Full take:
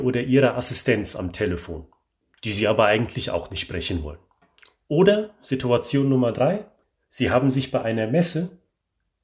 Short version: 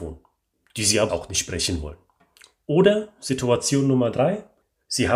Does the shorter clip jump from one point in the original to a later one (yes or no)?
yes